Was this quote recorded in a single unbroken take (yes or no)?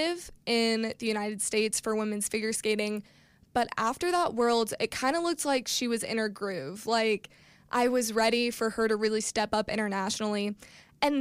yes